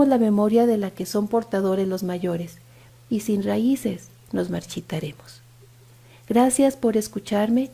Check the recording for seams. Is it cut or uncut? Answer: cut